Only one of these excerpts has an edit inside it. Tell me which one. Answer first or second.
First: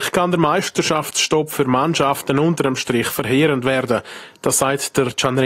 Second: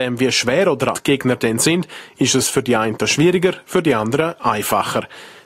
second